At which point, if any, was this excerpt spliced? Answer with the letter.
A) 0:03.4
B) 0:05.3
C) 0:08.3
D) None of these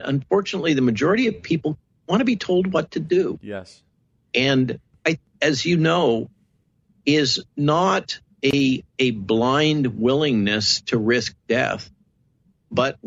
B